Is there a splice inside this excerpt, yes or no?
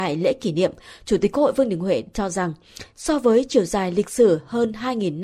no